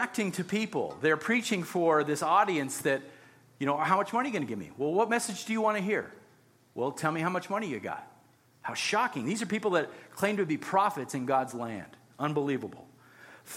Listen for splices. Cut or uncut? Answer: uncut